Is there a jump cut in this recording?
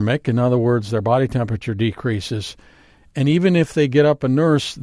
no; 0 cuts

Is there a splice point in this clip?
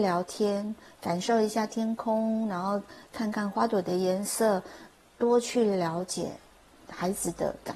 no; 0 cuts

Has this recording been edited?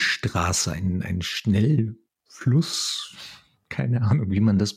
no; 0 cuts

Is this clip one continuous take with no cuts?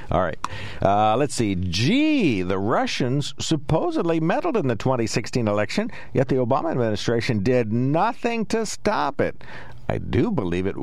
yes; 0 cuts

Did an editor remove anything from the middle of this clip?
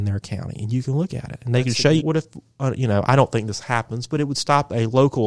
yes; 1 cut; at 2.0 s

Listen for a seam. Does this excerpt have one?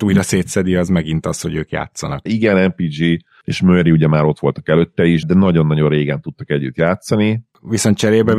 yes; 2 cuts; at 2.3 s, 5.2 s

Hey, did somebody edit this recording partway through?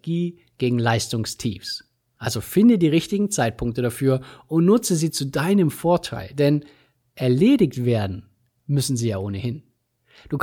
yes; 1 cut; at 2.2 s

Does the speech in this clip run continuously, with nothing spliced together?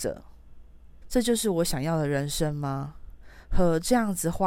no; 1 cut; at 1.0 s

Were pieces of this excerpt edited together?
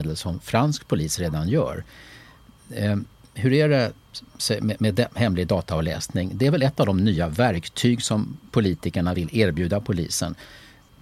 yes; 1 cut; at 9.1 s

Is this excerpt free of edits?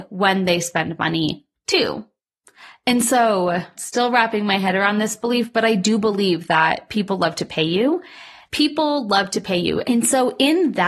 no; 3 cuts; at 3.7 s, 8.5 s, 9.8 s

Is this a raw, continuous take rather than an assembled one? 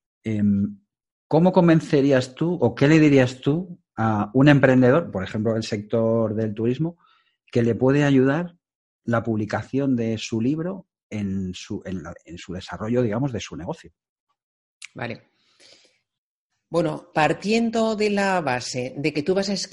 no; 1 cut; at 17.1 s

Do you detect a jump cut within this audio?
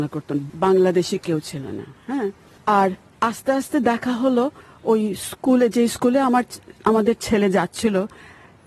no; 0 cuts

